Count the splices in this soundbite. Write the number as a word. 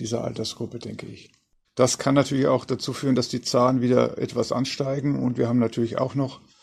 one